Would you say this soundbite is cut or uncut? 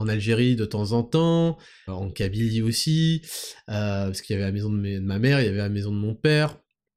cut